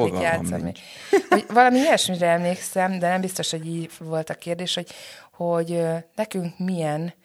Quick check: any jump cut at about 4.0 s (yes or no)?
yes